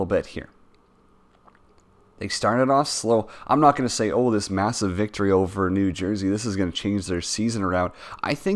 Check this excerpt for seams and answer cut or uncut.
uncut